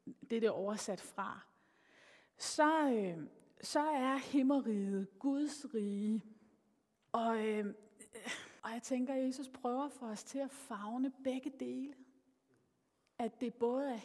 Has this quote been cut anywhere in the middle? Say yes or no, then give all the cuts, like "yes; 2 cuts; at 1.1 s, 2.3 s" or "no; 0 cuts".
yes; 2 cuts; at 7.1 s, 8.6 s